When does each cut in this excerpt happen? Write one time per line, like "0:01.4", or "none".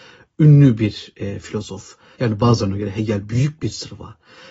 0:02.1

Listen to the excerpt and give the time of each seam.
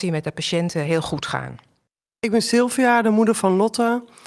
none

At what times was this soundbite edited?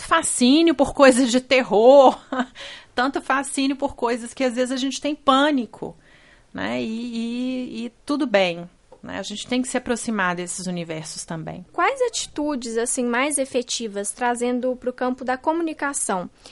none

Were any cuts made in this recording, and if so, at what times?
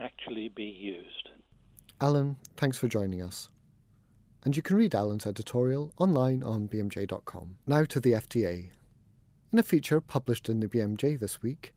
0:07.6

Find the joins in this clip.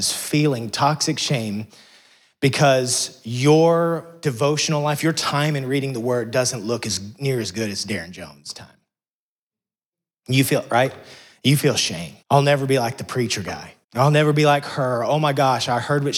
0:12.2
0:13.8

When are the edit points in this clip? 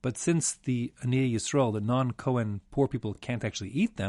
none

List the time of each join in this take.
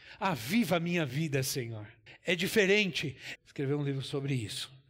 0:02.1
0:03.4

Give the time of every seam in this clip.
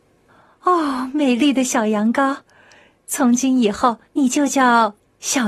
0:04.0

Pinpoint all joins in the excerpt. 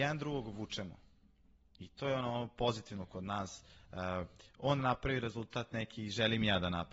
none

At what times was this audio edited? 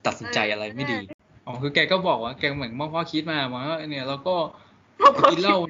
none

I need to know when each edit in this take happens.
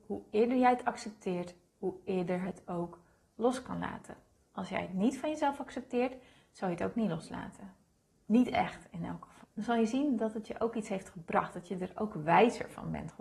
0:09.4

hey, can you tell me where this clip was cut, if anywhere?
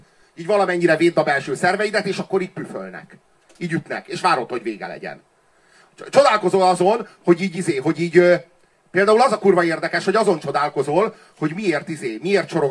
none

